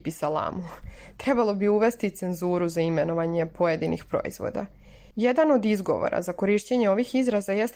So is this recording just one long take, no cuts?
no; 1 cut; at 5.1 s

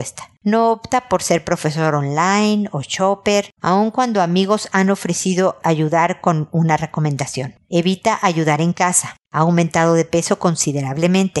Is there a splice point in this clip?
yes; 2 cuts; at 3.6 s, 9.2 s

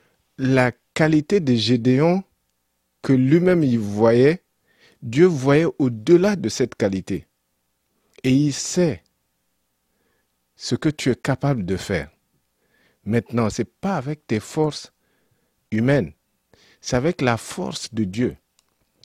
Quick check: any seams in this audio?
yes; 2 cuts; at 8.1 s, 13.5 s

